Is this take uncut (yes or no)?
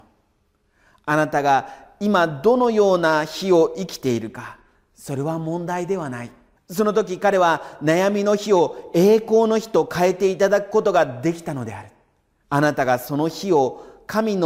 no